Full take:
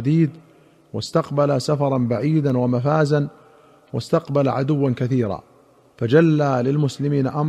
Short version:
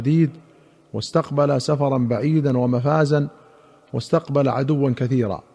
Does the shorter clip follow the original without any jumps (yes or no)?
yes